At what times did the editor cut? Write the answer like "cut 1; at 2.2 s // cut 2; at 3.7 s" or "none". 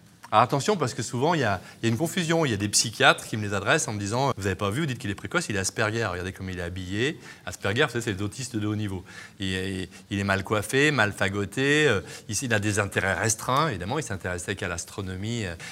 cut 1; at 4.3 s